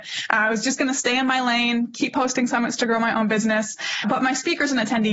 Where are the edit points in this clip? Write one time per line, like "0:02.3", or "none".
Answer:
none